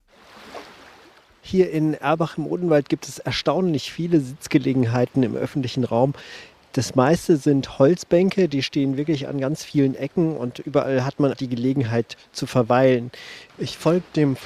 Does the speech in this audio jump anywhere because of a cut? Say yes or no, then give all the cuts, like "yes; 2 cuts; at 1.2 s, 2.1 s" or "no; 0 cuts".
yes; 2 cuts; at 11.3 s, 13.5 s